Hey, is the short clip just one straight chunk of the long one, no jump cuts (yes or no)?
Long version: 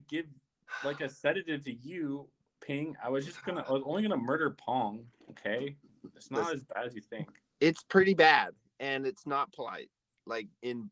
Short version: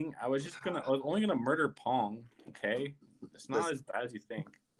yes